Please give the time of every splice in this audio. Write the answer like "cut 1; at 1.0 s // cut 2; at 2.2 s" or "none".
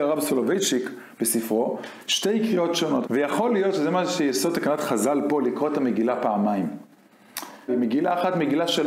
cut 1; at 3.0 s // cut 2; at 7.7 s